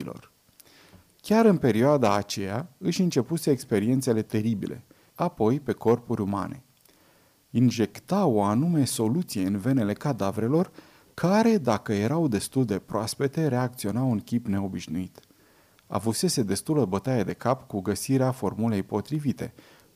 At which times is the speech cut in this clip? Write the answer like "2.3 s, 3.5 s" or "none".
5.1 s